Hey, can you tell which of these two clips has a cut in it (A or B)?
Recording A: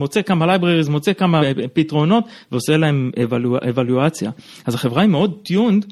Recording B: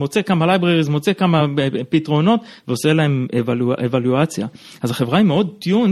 A